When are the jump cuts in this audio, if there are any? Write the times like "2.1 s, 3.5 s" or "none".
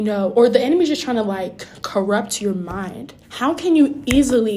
3.2 s